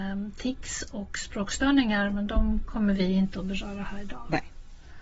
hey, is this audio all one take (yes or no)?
yes